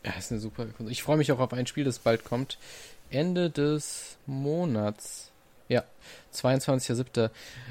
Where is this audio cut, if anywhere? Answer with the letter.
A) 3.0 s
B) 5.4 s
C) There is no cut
C